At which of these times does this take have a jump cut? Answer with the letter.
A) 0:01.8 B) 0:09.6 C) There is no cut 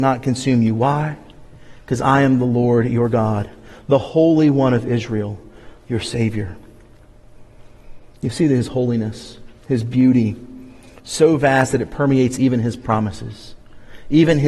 C